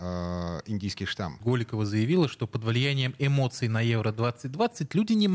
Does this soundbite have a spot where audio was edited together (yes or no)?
yes